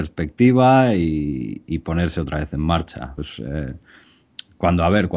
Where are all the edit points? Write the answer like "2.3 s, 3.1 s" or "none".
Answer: 3.2 s